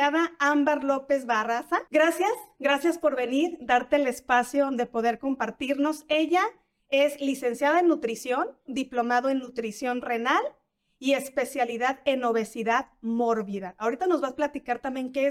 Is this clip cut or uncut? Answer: cut